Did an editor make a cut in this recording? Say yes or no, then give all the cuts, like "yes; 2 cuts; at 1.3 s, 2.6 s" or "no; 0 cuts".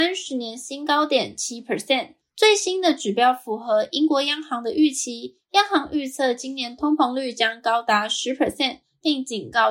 yes; 1 cut; at 2.2 s